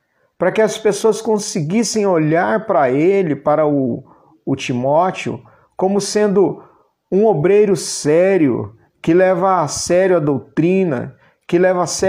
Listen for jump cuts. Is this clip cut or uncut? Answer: uncut